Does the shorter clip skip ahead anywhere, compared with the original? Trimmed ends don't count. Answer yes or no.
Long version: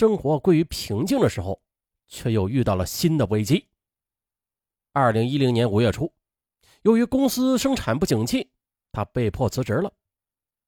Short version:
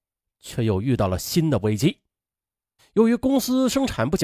yes